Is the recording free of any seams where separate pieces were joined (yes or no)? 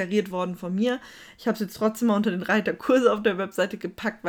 yes